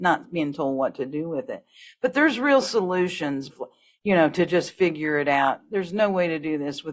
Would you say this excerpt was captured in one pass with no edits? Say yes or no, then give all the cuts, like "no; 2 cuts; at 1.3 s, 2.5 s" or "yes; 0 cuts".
no; 1 cut; at 3.5 s